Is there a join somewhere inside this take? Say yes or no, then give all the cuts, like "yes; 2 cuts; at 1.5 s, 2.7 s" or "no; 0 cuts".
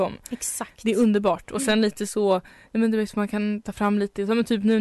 no; 0 cuts